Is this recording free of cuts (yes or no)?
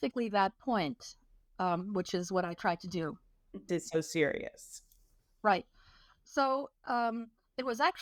no